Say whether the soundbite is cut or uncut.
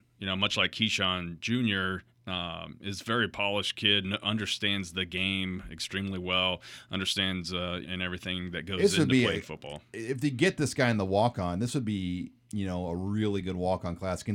cut